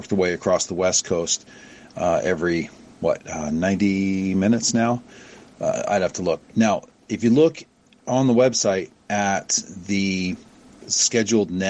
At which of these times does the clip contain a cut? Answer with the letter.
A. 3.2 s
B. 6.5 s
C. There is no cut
B